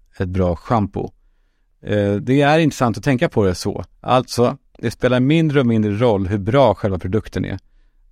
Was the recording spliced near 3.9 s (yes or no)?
yes